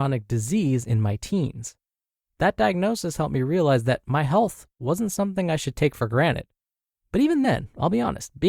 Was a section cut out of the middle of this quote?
no; 0 cuts

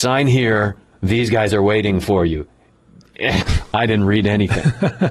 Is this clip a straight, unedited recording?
no; 1 cut; at 3.4 s

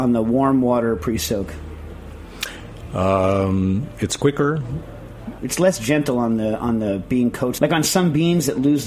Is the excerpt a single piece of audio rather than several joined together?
no; 2 cuts; at 5.4 s, 7.6 s

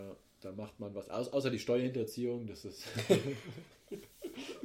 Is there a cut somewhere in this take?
no; 0 cuts

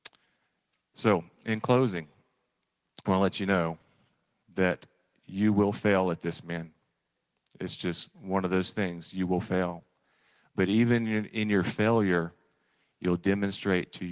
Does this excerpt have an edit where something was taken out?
yes; 1 cut; at 3.0 s

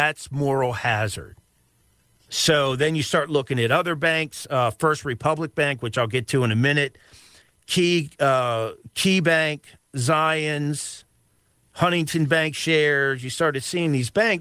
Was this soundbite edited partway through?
yes; 1 cut; at 2.2 s

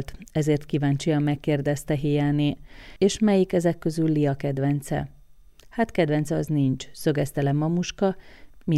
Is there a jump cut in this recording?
no; 0 cuts

